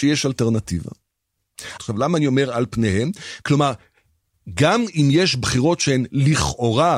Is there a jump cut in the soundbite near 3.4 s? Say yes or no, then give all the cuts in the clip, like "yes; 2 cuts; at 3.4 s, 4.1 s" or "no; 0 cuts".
yes; 2 cuts; at 1.8 s, 3.4 s